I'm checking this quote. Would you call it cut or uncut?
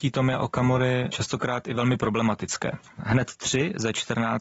uncut